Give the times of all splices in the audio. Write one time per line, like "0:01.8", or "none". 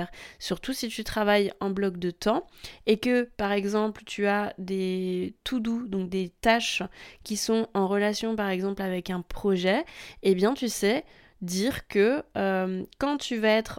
none

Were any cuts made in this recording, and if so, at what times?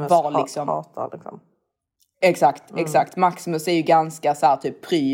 none

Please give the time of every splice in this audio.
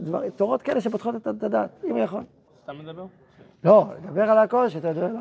0:02.5

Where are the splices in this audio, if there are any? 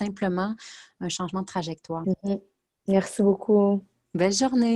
0:02.0

